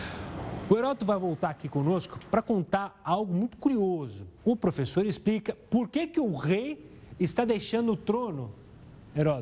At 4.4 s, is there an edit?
yes; 1 cut; at 4.4 s

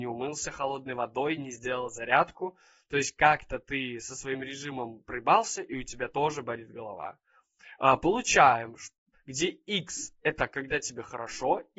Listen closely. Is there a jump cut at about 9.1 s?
yes; 1 cut; at 9.1 s

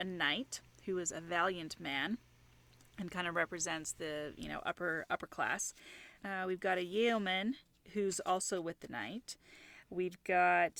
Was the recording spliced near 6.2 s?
yes; 1 cut; at 6.2 s

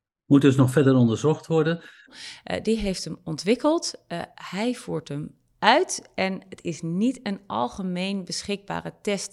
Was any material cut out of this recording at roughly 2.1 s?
yes; 1 cut; at 2.1 s

